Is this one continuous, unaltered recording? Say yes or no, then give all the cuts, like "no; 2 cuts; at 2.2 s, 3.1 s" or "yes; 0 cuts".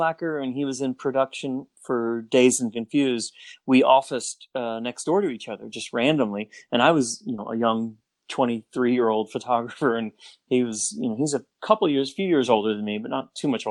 yes; 0 cuts